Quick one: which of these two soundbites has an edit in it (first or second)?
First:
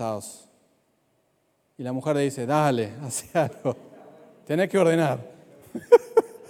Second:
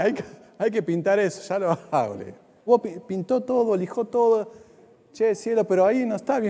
second